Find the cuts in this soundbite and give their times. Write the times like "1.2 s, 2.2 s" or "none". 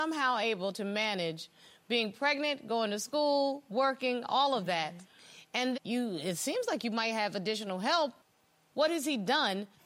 5.7 s